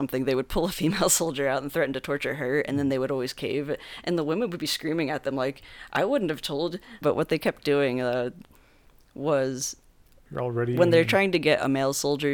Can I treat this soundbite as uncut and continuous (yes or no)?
no